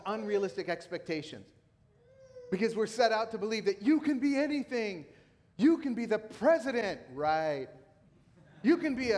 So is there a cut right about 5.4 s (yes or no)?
no